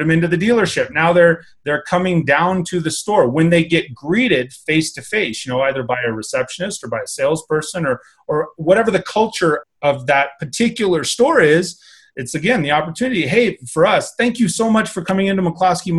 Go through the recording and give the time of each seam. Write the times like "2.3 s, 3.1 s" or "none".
9.6 s